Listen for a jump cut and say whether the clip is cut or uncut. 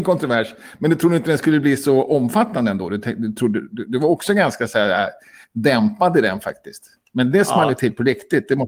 uncut